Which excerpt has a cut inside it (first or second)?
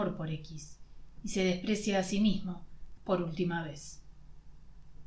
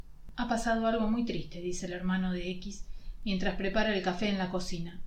first